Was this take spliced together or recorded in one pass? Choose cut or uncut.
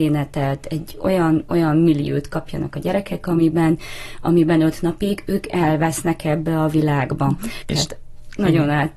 cut